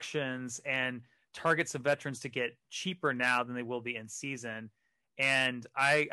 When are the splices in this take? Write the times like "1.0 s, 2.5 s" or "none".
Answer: none

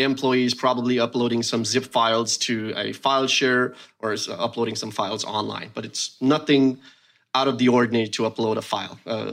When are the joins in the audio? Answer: none

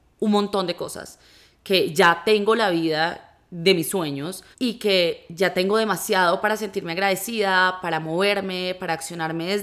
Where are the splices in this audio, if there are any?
4.5 s

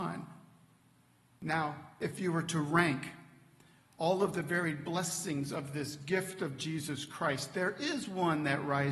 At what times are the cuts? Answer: none

